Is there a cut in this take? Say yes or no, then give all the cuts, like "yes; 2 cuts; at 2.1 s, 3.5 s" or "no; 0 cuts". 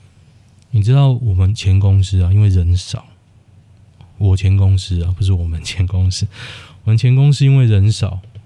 no; 0 cuts